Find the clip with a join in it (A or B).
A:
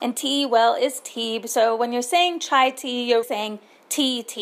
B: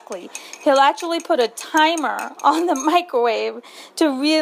A